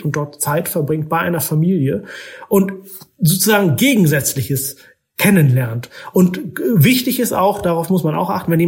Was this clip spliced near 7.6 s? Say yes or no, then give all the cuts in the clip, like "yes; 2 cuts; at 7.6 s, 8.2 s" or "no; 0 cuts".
no; 0 cuts